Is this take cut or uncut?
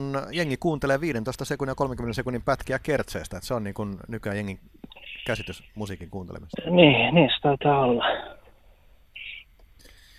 uncut